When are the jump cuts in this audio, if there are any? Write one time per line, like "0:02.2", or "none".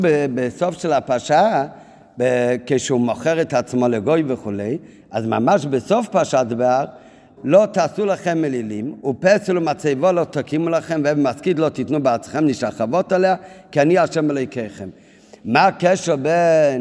0:07.4